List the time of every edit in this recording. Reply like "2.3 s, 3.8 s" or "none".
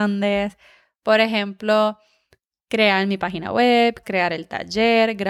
4.0 s

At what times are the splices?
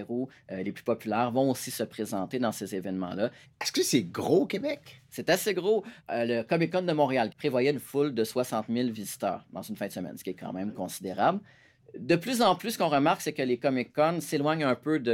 3.5 s, 7.3 s, 11.8 s

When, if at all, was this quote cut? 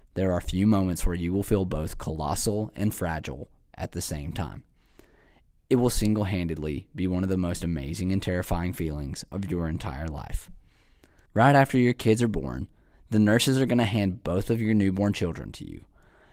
11.3 s

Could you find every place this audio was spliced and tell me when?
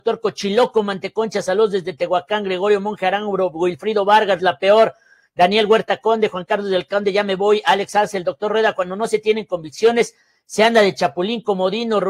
4.4 s

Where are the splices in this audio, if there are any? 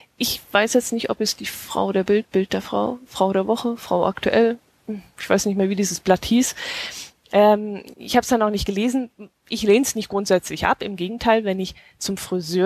none

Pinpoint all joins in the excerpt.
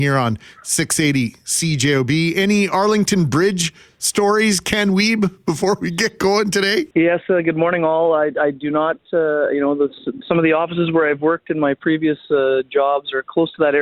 6.9 s, 10.2 s

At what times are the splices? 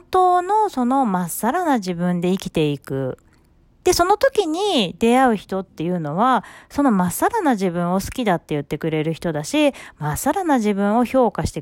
none

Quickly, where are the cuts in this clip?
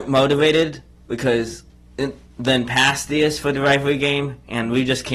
none

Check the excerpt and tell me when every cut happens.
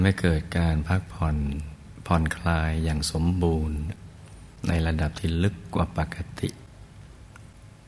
none

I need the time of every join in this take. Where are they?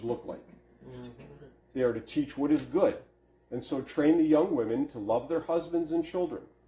1.6 s

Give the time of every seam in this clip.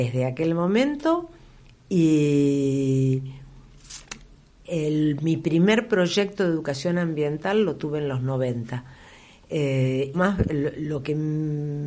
10.1 s

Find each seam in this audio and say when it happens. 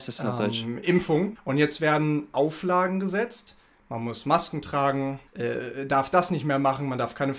1.4 s, 5.3 s

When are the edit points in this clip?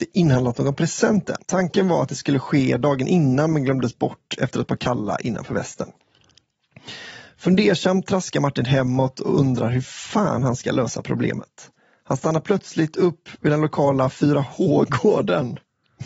1.4 s

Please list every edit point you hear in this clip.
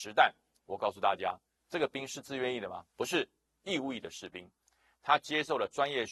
1.6 s

